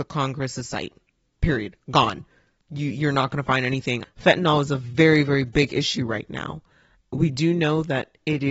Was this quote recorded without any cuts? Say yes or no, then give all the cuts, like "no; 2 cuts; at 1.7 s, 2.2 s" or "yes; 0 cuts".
no; 2 cuts; at 4.0 s, 7.0 s